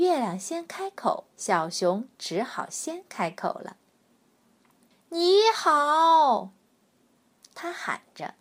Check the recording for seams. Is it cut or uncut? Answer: cut